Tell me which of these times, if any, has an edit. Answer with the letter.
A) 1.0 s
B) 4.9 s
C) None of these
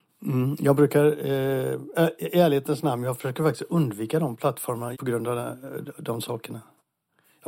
B